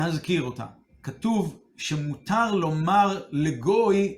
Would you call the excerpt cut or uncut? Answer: cut